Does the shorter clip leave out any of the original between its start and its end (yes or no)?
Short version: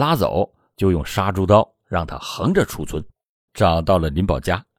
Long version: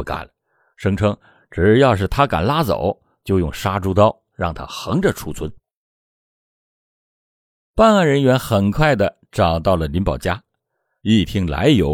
yes